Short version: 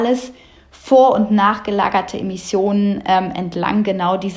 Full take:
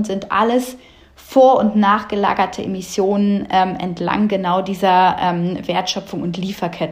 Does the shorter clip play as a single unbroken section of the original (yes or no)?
yes